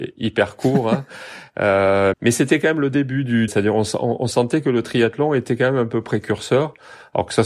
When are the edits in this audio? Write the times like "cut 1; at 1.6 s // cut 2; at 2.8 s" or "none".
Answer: cut 1; at 2.1 s // cut 2; at 3.5 s